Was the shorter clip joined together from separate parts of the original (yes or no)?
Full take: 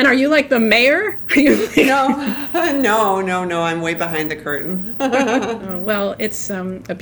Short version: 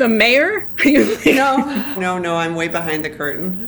yes